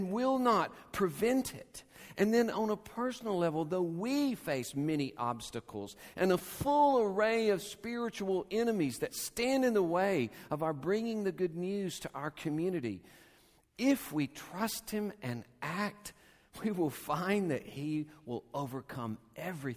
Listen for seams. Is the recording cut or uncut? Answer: uncut